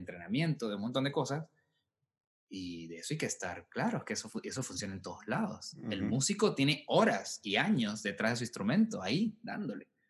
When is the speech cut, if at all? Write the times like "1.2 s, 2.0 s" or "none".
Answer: none